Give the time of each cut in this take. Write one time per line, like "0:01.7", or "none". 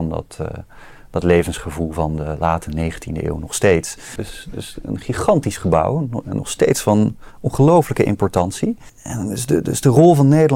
0:04.2
0:08.9